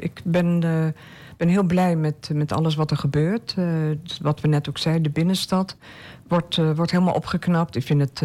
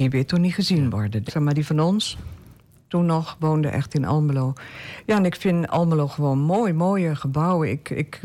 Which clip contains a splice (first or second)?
second